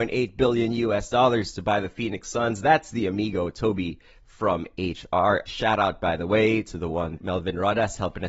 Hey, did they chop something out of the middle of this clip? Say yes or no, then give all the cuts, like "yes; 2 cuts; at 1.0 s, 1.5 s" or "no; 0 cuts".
yes; 2 cuts; at 5.5 s, 7.2 s